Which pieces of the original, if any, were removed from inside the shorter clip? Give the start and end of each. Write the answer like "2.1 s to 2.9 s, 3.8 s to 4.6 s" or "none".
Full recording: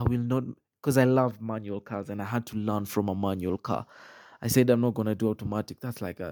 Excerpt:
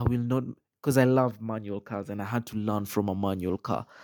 none